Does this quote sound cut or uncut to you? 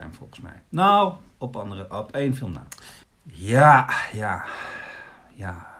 cut